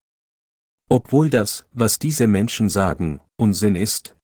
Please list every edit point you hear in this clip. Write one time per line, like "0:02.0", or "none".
none